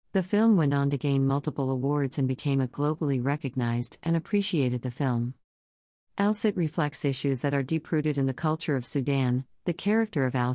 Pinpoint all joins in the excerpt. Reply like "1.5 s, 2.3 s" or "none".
9.6 s